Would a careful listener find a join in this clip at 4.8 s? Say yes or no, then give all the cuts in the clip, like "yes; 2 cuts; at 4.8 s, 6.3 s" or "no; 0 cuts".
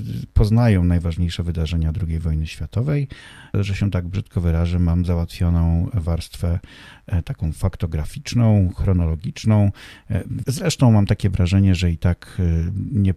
no; 2 cuts; at 3.5 s, 10.4 s